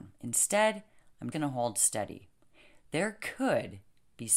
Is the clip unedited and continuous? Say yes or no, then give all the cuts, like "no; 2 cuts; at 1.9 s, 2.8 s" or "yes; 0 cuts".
no; 1 cut; at 1.3 s